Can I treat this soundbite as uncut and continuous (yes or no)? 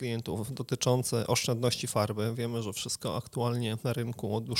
yes